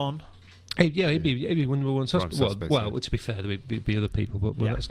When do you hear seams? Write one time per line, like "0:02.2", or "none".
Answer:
none